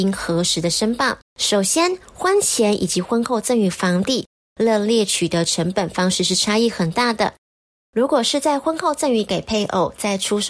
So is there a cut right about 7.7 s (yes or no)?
no